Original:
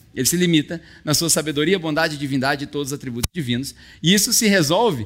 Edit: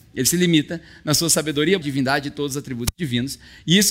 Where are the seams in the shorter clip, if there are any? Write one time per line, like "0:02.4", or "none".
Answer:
0:01.8